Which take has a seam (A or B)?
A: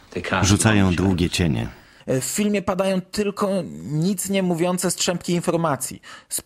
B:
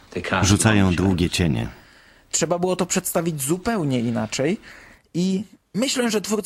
A